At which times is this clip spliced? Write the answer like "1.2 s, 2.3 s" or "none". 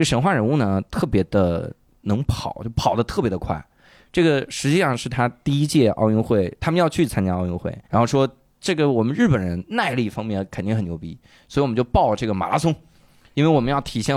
7.8 s

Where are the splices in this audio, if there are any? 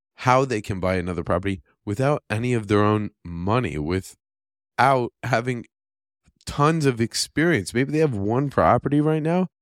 none

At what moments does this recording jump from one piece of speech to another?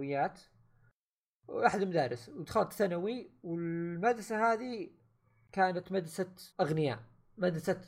6.5 s

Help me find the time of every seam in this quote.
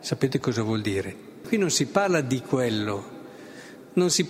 1.4 s

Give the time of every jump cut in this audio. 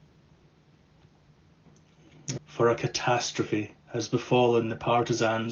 2.4 s

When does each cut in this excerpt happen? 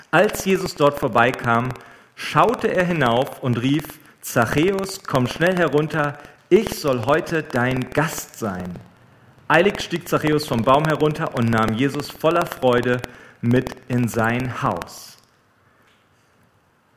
none

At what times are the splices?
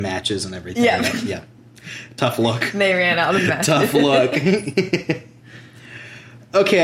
none

